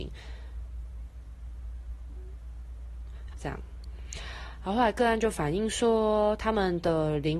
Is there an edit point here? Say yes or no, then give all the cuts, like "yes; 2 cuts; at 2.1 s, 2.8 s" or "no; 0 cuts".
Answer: yes; 1 cut; at 3.3 s